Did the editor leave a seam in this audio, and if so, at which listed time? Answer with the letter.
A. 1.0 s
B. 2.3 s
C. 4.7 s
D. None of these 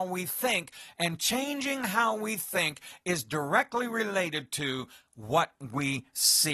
D